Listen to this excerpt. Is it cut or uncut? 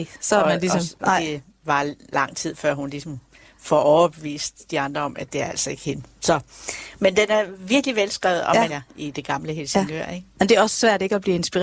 cut